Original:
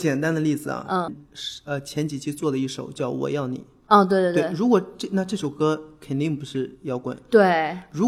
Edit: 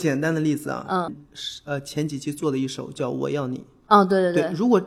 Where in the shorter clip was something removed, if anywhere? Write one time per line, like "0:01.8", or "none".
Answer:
none

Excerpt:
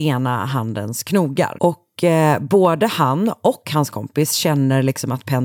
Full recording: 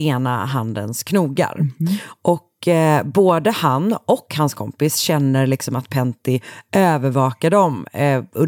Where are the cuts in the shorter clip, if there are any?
0:01.5

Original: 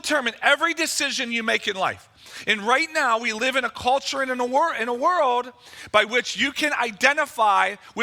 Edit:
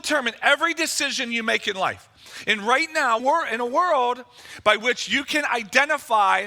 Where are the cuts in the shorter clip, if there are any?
0:03.2

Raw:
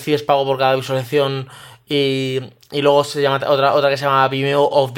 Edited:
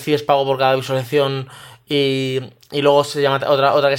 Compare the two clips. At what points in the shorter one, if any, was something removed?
none

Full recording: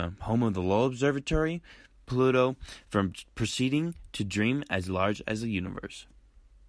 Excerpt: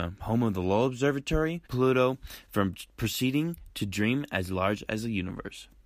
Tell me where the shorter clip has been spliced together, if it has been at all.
0:01.7

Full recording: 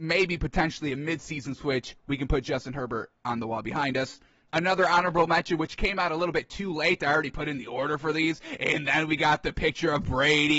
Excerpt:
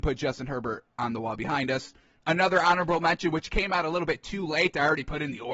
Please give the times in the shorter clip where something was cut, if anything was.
none

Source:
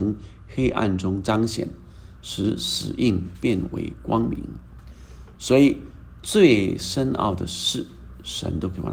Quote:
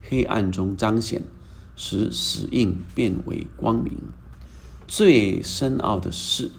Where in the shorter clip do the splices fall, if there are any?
0:04.9

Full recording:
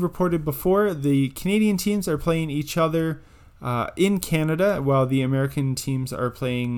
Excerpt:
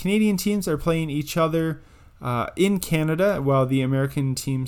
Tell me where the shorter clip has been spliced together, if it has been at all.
none

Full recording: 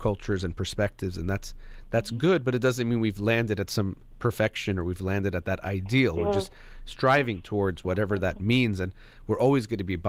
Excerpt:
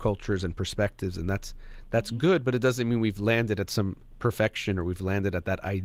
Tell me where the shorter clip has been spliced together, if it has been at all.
none

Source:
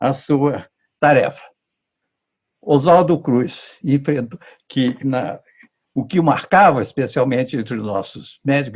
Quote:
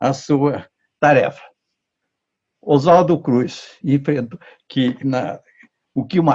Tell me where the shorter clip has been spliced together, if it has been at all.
none

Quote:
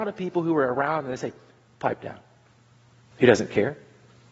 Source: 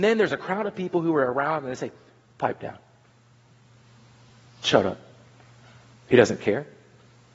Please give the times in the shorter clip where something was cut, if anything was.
0:03.1

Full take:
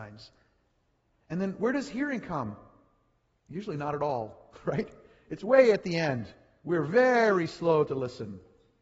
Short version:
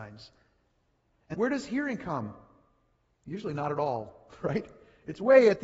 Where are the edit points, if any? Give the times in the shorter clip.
0:01.3

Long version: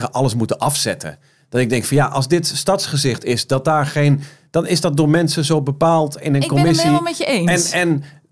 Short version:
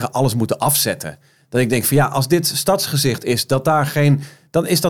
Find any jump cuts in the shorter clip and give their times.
none

